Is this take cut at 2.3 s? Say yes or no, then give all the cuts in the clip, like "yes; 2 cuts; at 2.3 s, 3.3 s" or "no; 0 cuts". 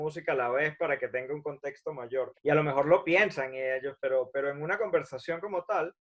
yes; 1 cut; at 2.3 s